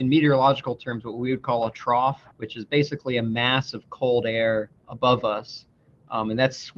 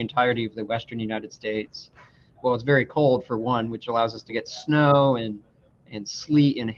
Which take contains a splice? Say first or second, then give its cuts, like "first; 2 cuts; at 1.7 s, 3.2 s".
first; 2 cuts; at 2.3 s, 4.8 s